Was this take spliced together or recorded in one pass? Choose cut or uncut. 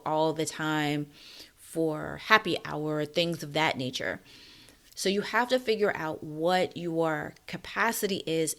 uncut